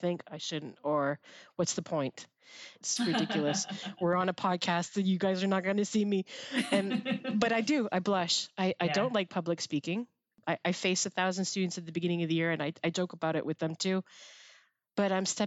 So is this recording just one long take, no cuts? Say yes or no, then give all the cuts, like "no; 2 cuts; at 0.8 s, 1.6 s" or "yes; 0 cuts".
no; 1 cut; at 2.8 s